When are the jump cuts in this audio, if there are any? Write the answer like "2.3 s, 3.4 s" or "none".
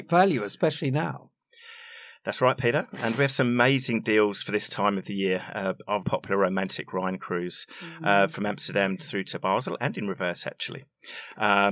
6.0 s

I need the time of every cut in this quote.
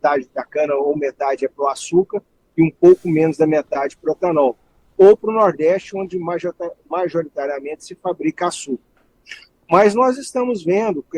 none

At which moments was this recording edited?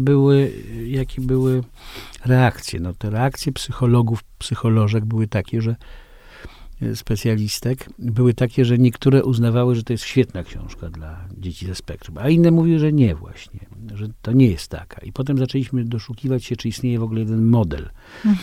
none

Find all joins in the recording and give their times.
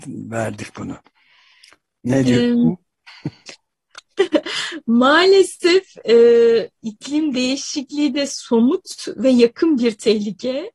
none

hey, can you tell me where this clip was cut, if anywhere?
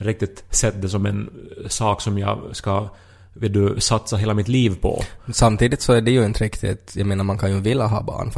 none

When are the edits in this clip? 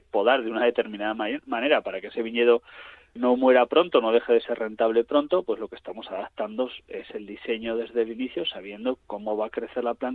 3.2 s

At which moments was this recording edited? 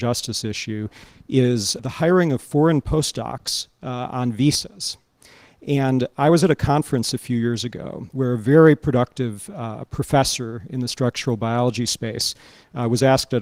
1.8 s

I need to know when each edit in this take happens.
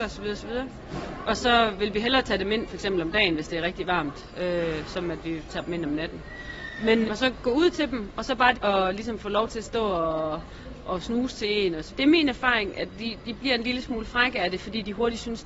7.0 s, 8.5 s, 11.9 s

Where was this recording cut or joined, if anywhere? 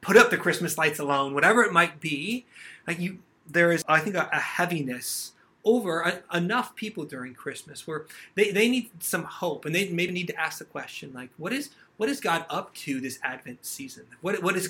3.8 s, 10.1 s

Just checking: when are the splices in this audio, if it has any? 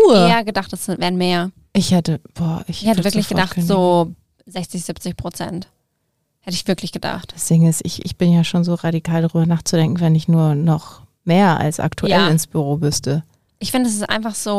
none

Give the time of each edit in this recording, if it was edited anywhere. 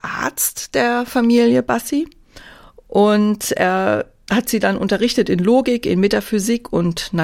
none

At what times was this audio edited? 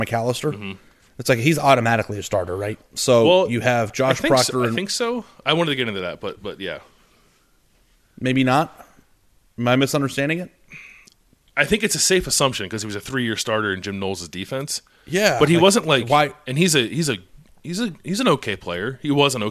none

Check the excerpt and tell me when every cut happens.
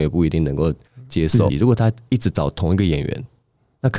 1.5 s

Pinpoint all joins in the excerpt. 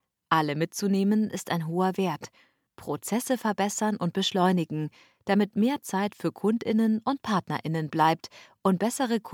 2.7 s

